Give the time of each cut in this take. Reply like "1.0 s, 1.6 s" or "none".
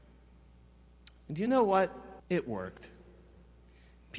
2.2 s